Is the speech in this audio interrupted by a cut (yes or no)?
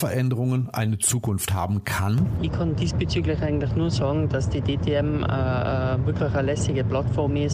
no